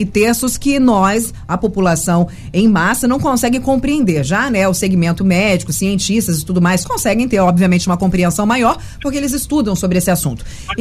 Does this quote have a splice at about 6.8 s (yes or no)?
yes